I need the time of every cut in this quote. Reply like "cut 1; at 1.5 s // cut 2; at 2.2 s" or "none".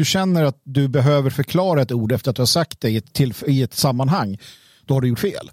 cut 1; at 3.1 s